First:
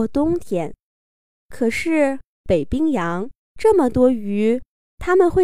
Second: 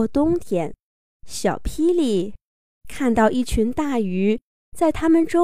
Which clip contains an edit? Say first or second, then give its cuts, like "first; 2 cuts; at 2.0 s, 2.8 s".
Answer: second; 1 cut; at 1.2 s